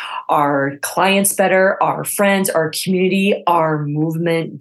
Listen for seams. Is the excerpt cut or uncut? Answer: uncut